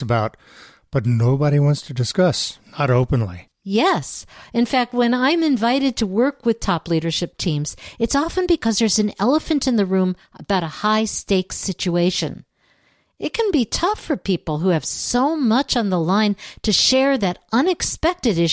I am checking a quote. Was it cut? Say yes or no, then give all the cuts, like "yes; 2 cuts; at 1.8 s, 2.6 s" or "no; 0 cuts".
no; 0 cuts